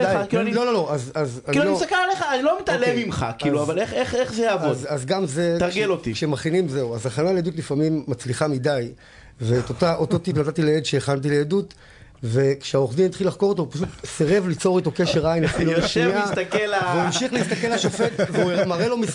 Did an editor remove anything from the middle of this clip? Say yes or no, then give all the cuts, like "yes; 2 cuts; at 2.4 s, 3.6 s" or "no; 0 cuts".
no; 0 cuts